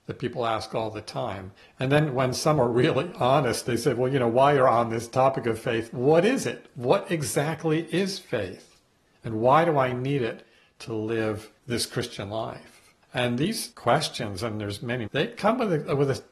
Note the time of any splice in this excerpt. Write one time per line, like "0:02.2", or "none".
0:15.1